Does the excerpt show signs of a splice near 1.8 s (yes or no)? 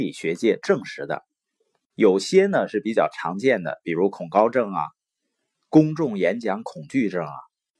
no